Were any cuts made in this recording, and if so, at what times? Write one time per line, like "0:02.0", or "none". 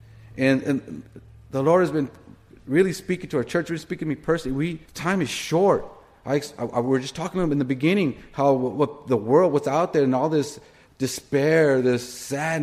0:04.8